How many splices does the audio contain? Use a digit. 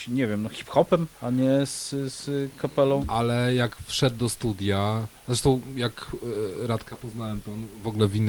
2